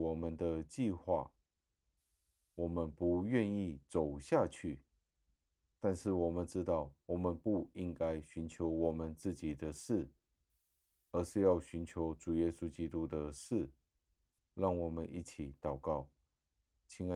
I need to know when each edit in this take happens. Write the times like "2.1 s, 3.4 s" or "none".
14.4 s